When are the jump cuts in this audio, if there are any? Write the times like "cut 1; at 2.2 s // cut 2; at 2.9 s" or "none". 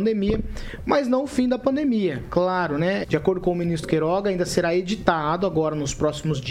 cut 1; at 3.0 s

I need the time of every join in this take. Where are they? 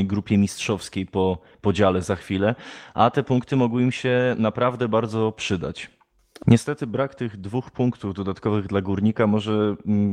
cut 1; at 6.4 s

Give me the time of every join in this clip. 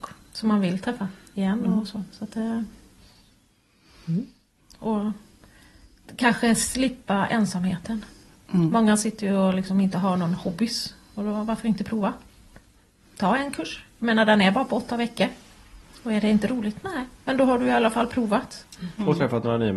none

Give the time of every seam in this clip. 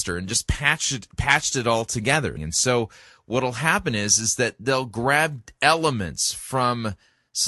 cut 1; at 2.4 s

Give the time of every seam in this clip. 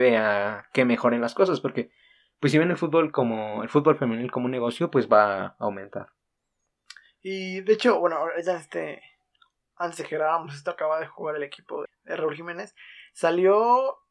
cut 1; at 11.9 s

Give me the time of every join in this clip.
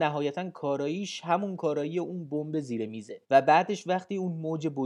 cut 1; at 3.2 s

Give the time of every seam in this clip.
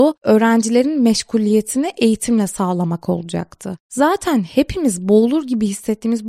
cut 1; at 3.8 s

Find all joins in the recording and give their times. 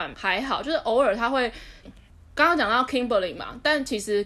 cut 1; at 1.8 s

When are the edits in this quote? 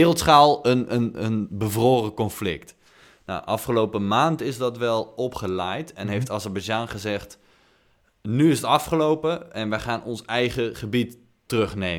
none

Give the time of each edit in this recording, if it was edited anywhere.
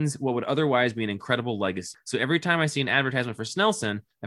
none

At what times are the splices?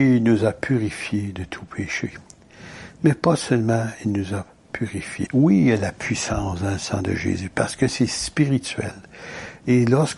cut 1; at 5.3 s

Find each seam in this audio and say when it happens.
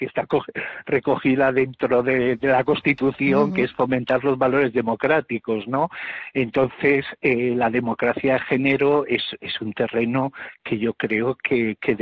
none

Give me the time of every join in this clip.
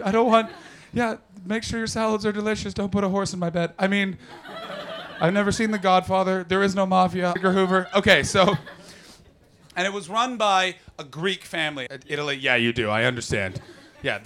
cut 1; at 7.4 s // cut 2; at 11.9 s

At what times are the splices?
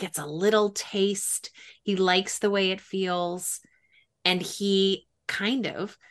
none

